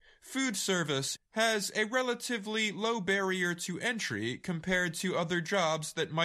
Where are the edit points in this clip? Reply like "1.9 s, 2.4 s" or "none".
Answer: 1.2 s